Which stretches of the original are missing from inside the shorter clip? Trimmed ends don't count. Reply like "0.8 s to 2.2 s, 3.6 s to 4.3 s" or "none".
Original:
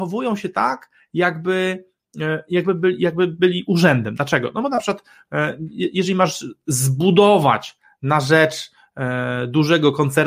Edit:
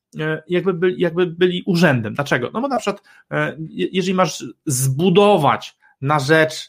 none